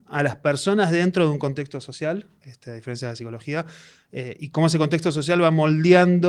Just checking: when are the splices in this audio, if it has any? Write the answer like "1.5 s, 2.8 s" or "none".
2.4 s